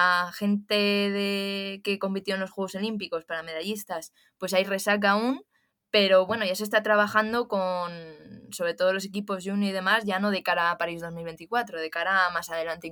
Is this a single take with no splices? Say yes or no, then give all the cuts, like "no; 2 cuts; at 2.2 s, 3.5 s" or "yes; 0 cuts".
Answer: yes; 0 cuts